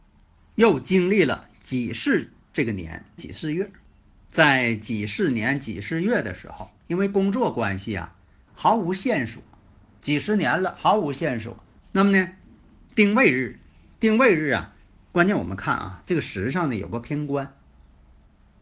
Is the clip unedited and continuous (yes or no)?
no